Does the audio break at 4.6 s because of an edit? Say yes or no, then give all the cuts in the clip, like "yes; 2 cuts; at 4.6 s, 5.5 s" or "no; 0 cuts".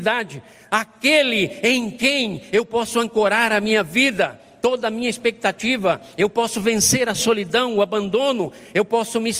no; 0 cuts